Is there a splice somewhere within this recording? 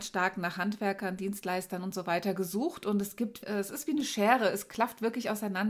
yes; 1 cut; at 3.4 s

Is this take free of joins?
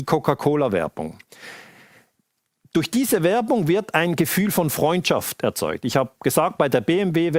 yes; 0 cuts

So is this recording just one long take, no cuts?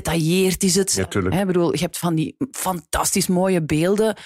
yes; 0 cuts

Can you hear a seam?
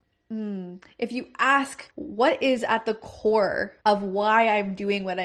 yes; 2 cuts; at 1.9 s, 3.8 s

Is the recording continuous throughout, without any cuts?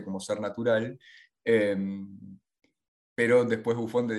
yes; 0 cuts

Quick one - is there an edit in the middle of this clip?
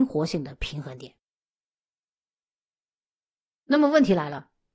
no; 0 cuts

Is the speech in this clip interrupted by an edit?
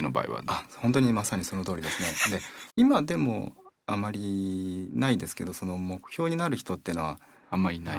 yes; 1 cut; at 2.7 s

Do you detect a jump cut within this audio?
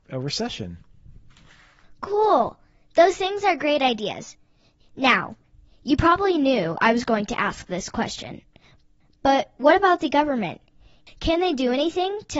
no; 0 cuts

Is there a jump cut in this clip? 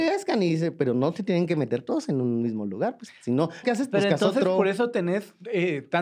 yes; 1 cut; at 3.6 s

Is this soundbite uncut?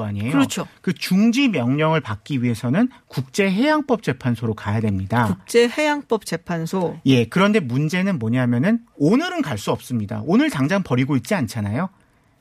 yes; 0 cuts

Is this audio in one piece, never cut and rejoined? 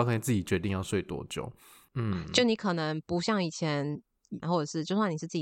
no; 2 cuts; at 1.9 s, 4.4 s

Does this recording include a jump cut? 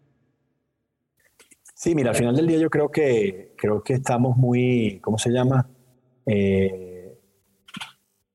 no; 0 cuts

